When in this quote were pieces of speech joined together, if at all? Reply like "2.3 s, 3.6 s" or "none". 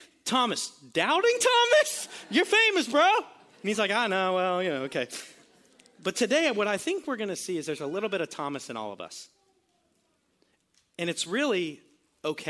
none